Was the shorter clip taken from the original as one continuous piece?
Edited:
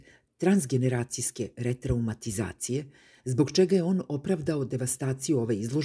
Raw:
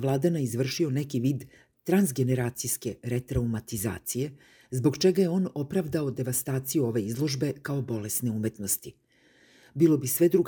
yes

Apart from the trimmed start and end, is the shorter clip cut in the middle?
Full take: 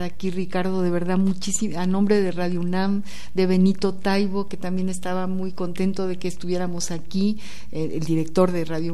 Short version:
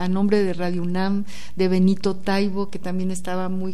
no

